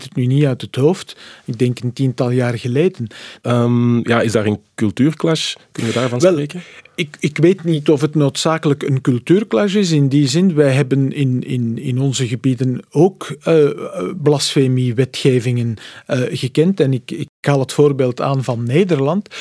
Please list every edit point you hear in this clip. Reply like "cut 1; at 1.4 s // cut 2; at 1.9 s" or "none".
cut 1; at 3.4 s

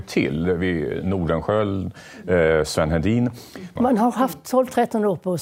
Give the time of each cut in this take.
cut 1; at 3.8 s

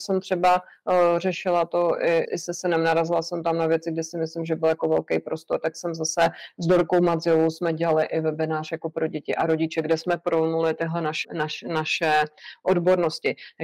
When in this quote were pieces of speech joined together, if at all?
cut 1; at 2.3 s // cut 2; at 11.2 s

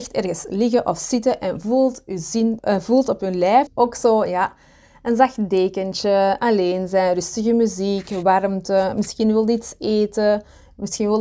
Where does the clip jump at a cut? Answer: cut 1; at 2.6 s // cut 2; at 3.7 s

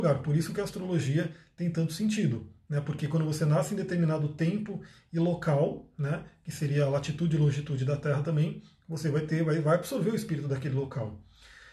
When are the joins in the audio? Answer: none

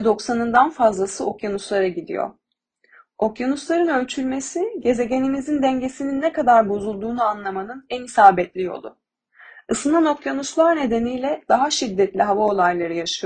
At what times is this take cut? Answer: none

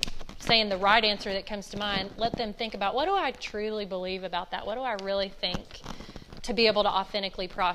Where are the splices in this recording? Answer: none

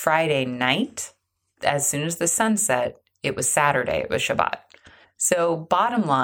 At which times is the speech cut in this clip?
cut 1; at 5.0 s

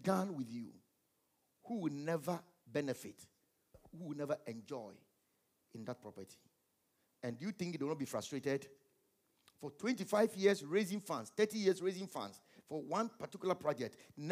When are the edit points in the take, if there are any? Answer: none

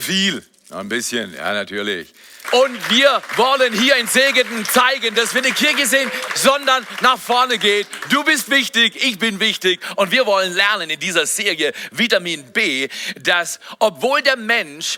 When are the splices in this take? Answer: cut 1; at 2.4 s // cut 2; at 6.3 s

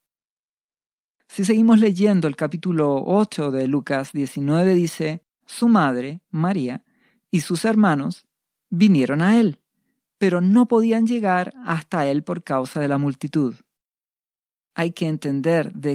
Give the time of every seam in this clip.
cut 1; at 5.4 s

